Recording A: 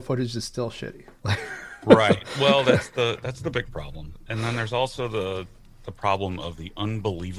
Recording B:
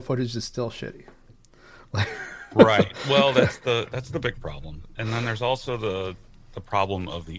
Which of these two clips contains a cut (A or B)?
A